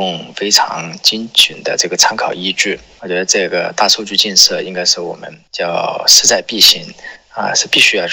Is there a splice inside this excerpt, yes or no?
no